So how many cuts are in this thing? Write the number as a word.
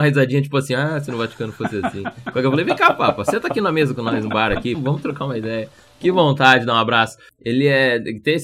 one